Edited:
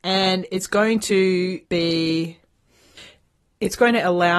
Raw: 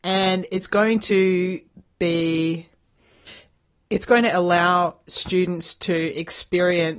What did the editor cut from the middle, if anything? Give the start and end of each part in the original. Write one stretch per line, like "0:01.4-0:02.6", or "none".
0:01.6-0:01.9